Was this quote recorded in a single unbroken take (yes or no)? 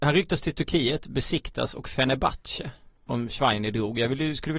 no